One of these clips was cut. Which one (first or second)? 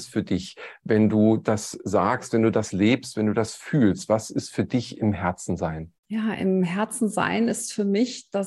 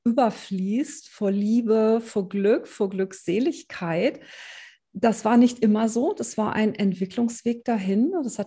first